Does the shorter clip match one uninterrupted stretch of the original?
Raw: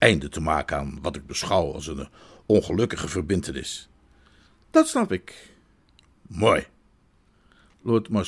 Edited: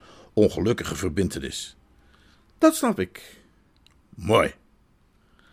yes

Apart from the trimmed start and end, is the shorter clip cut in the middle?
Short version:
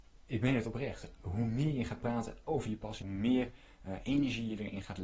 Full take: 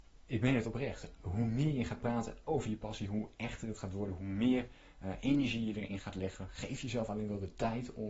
yes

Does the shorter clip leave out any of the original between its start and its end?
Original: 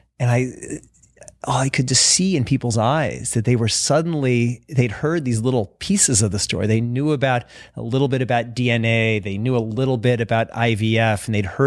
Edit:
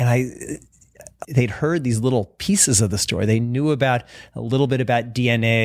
yes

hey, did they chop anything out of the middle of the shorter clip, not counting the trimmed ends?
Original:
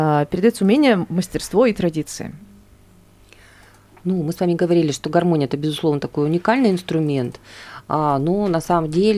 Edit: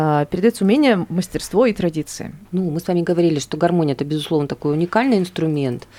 yes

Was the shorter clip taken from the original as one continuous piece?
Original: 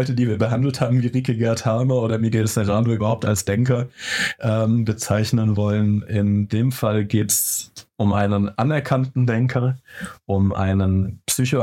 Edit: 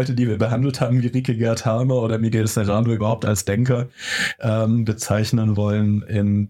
yes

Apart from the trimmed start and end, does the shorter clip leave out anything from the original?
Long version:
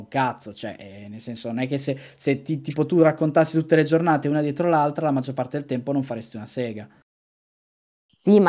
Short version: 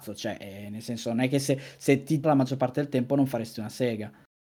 yes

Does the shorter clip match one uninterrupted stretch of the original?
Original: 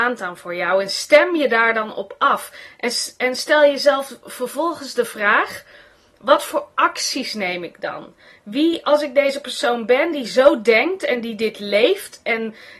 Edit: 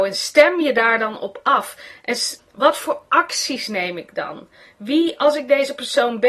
no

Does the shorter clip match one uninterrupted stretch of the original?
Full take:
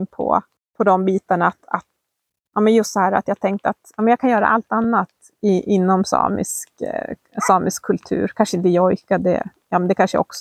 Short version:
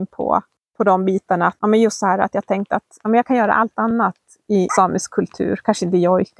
no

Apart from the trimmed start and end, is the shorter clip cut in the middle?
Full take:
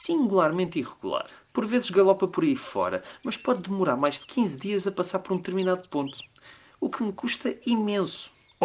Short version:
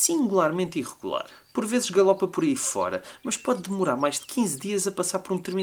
no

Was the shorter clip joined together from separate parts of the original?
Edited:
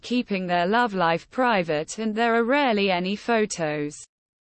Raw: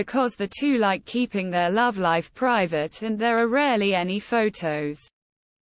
no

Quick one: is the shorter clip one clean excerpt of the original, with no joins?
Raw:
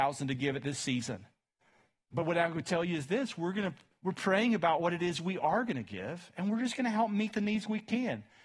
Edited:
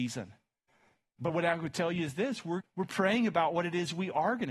no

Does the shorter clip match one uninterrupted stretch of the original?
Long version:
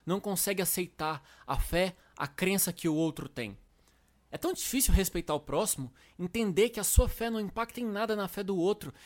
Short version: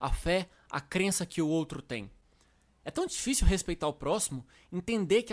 yes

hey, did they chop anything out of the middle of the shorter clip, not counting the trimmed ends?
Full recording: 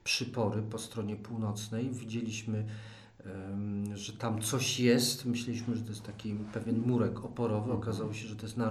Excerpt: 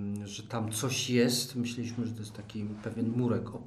no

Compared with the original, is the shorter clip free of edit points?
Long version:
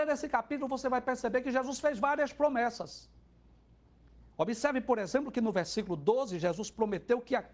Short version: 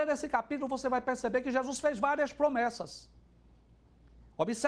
yes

